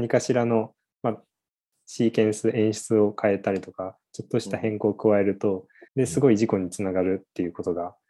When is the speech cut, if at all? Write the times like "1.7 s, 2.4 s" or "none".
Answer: 5.9 s